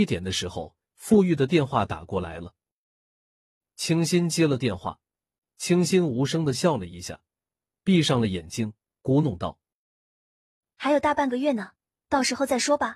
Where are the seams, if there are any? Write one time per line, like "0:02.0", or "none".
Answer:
0:05.4